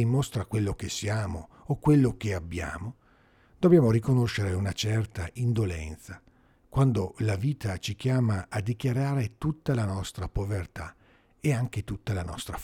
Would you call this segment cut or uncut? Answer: uncut